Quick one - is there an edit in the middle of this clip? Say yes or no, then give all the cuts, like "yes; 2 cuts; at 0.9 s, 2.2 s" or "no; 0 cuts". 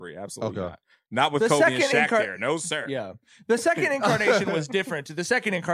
no; 0 cuts